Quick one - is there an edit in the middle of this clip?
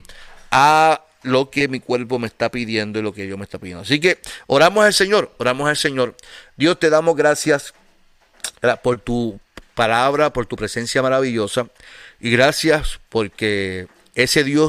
no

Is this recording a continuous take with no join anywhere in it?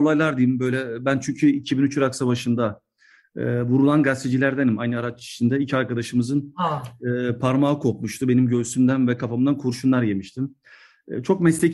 yes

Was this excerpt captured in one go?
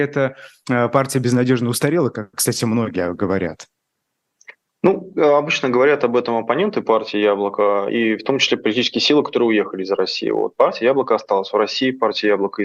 yes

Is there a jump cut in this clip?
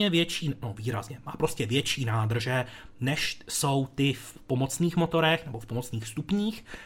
no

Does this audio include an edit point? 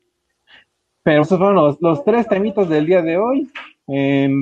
yes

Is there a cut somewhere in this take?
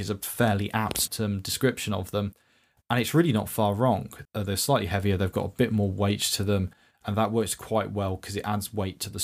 yes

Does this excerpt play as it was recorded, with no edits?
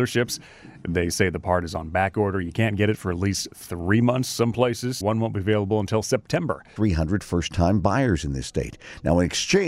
no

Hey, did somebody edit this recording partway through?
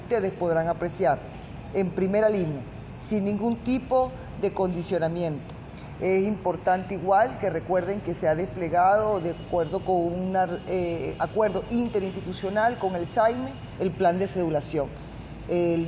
no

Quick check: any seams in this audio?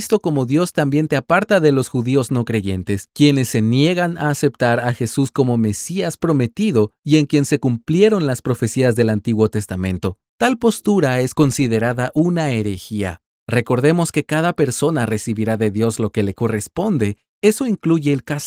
yes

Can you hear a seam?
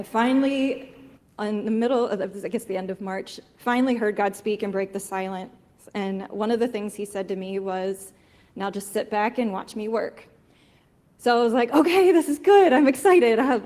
no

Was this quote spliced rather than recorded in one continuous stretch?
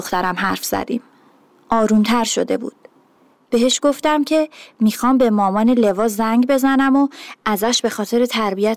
no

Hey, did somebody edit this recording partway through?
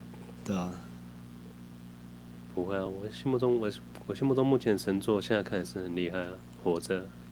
no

